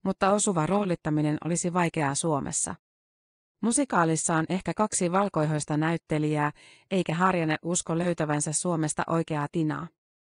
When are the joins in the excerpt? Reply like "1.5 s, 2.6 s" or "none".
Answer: none